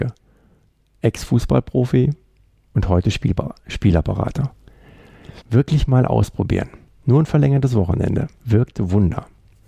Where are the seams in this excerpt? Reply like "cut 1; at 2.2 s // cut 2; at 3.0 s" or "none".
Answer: cut 1; at 5.4 s